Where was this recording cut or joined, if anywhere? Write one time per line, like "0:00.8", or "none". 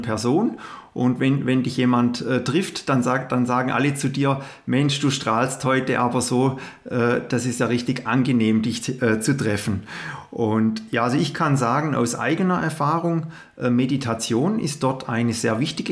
none